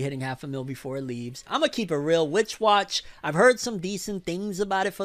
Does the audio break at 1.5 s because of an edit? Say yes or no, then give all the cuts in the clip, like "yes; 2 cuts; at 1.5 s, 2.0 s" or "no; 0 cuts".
yes; 1 cut; at 1.5 s